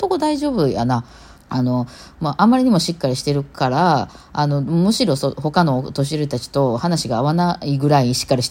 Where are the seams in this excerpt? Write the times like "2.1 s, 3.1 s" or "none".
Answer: 1.3 s